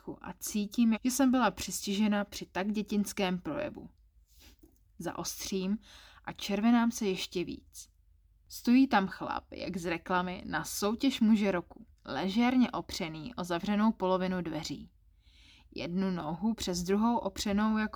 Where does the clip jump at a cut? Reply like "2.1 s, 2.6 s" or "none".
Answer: 0.9 s, 12.0 s